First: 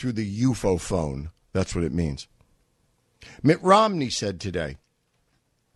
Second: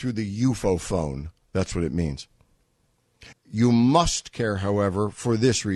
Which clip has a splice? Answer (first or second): second